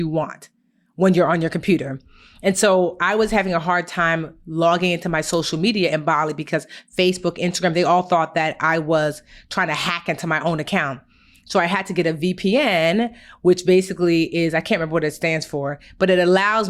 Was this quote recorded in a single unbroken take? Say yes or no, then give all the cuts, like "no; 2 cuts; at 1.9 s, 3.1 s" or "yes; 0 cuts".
yes; 0 cuts